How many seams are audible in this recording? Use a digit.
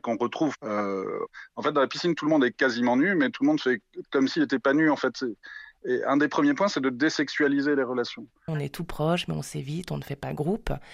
1